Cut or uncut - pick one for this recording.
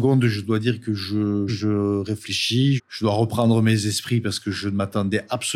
cut